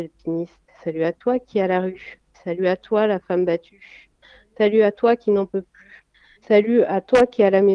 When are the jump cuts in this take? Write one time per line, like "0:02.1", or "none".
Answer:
0:06.4